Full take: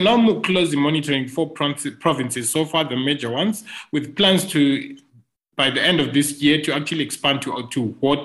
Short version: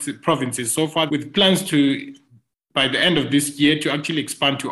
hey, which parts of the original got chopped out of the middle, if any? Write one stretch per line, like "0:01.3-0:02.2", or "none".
0:02.8-0:03.9